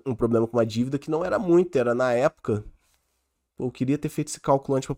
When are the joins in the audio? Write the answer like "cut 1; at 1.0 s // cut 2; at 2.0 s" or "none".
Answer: none